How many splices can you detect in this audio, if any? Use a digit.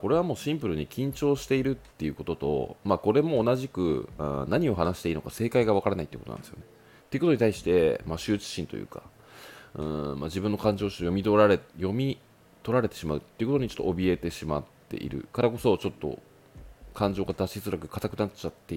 1